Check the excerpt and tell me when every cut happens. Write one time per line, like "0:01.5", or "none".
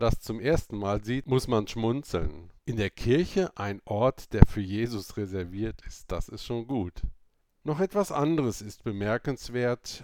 0:02.6
0:07.5